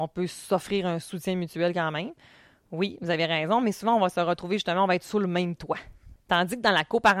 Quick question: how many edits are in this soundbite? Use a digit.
1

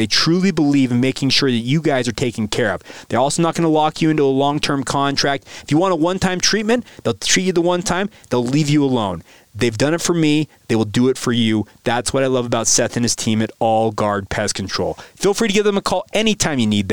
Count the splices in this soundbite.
0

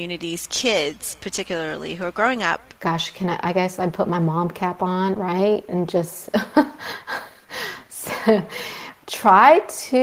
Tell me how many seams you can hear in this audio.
1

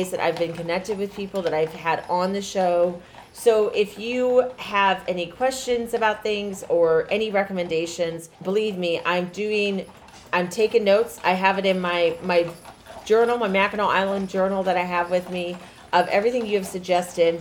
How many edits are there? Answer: 1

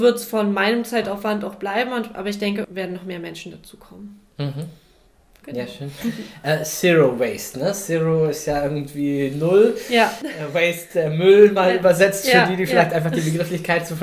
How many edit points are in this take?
1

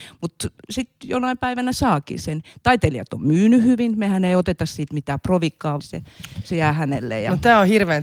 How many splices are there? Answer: 1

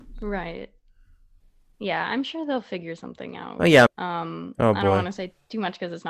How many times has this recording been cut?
1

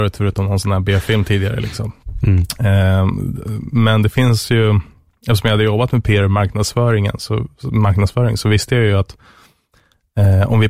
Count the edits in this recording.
0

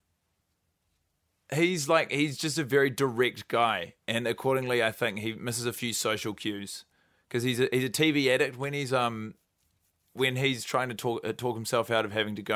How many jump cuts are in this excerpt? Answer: 0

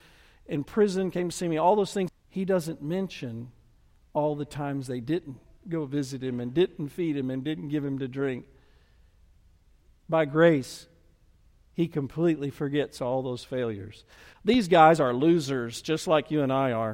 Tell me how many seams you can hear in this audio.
1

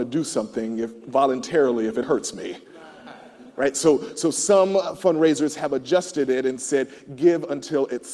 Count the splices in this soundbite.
1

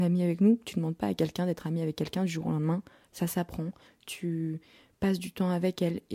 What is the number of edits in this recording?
1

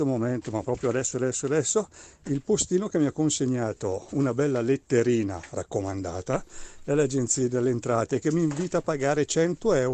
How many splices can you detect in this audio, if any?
1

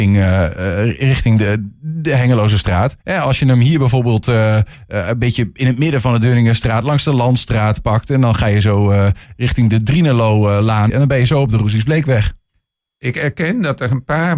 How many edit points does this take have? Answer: 2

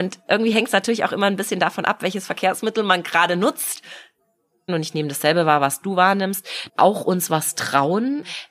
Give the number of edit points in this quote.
2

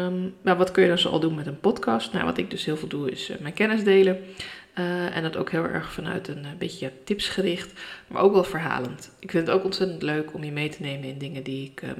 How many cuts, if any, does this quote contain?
0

